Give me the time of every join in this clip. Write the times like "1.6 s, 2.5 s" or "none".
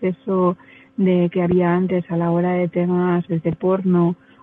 3.3 s